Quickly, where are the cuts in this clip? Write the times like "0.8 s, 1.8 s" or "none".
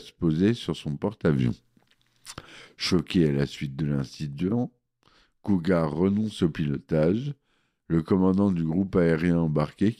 none